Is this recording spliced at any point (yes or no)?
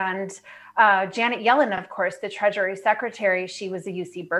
no